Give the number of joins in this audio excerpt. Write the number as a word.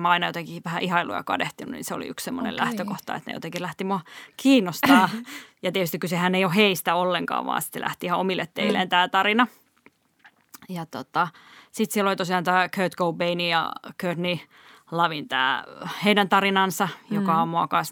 zero